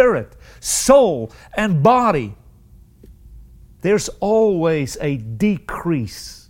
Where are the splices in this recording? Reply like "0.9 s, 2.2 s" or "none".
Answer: 3.8 s